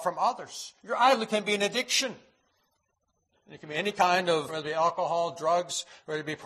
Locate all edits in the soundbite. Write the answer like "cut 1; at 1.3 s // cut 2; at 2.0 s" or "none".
cut 1; at 4.5 s